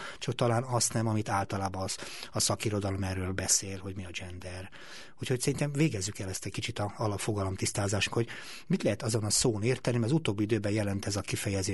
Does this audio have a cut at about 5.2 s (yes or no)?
no